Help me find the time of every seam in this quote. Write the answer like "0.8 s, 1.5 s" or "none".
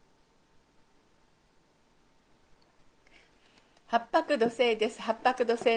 none